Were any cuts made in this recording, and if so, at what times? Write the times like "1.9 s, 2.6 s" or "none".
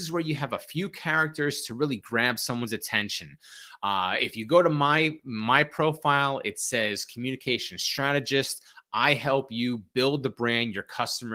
none